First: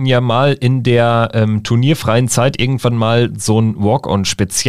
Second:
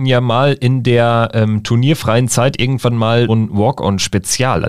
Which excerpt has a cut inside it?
second; 1 cut; at 3.3 s

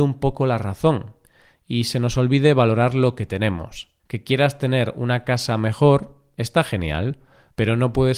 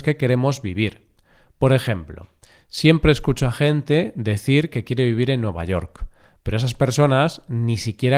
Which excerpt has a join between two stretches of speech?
first; 1 cut; at 4.0 s

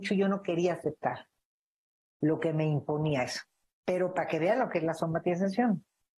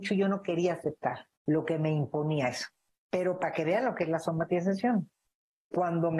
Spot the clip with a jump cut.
second; 1 cut; at 1.4 s

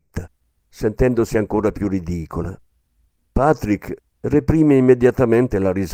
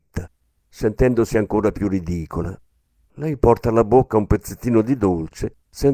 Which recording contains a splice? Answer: second; 1 cut; at 3.1 s

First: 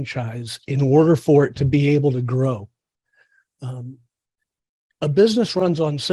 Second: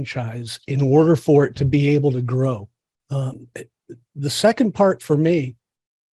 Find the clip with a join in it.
second; 1 cut; at 3.0 s

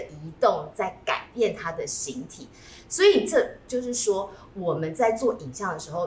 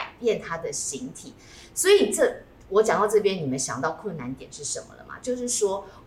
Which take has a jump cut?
first; 1 cut; at 3.7 s

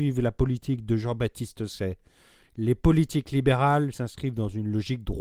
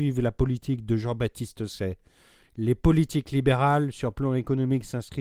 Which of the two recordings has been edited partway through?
first; 1 cut; at 3.9 s

